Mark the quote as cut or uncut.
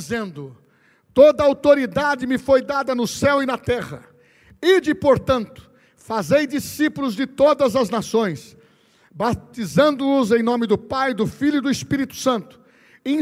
uncut